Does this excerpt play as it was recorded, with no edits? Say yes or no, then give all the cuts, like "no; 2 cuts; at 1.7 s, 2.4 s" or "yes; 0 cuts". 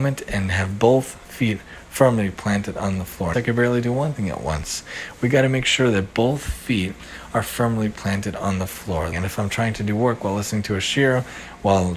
no; 2 cuts; at 3.3 s, 9.1 s